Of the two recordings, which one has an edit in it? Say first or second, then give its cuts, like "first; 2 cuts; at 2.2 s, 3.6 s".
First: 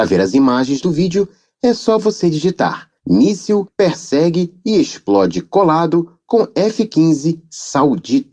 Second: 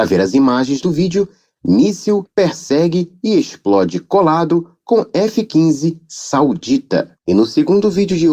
second; 1 cut; at 1.6 s